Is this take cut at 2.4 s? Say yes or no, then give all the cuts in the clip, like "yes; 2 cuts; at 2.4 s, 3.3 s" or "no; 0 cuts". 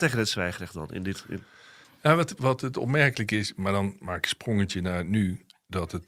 yes; 1 cut; at 2.4 s